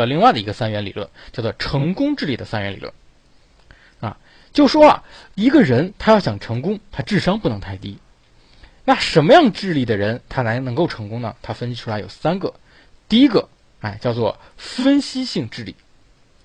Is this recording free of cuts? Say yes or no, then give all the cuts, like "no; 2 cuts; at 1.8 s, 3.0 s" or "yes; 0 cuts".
yes; 0 cuts